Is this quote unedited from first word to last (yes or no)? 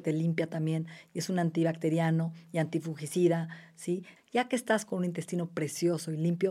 no